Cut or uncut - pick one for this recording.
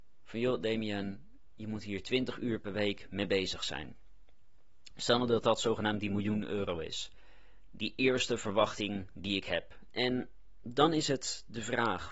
cut